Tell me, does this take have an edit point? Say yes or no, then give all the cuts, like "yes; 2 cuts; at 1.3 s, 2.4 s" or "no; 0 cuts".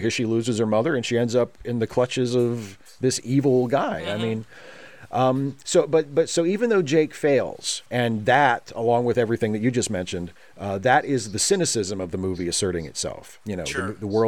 no; 0 cuts